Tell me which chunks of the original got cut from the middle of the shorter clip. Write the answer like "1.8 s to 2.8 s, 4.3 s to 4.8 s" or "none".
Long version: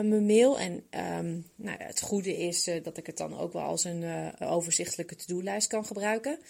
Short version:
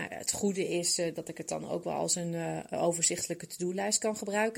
none